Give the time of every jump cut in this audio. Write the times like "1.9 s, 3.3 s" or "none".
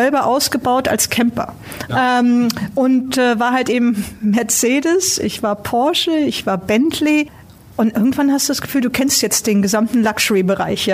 1.9 s